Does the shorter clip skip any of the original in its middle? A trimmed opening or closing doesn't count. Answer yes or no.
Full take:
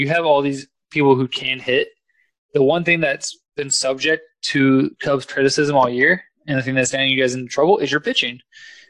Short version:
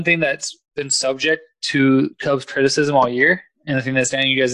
no